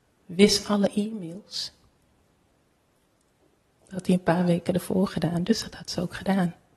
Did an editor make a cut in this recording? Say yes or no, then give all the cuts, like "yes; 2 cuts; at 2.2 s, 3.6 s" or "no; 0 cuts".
no; 0 cuts